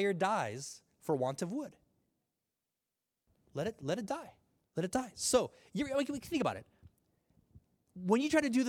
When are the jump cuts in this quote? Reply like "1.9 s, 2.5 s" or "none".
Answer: none